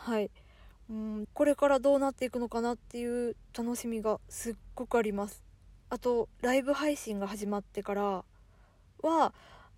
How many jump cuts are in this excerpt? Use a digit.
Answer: 1